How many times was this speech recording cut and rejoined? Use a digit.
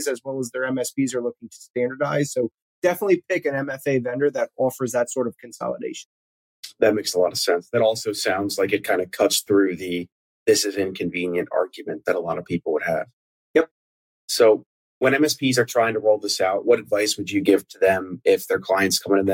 0